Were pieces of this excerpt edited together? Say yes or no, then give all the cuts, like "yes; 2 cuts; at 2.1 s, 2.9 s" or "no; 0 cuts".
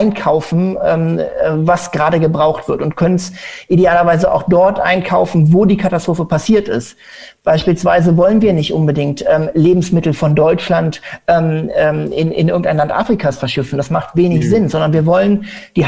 no; 0 cuts